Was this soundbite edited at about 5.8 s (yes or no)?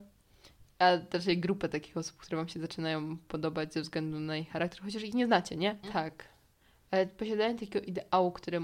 yes